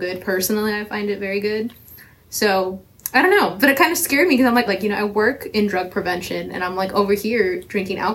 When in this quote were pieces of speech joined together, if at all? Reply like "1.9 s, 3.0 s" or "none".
4.7 s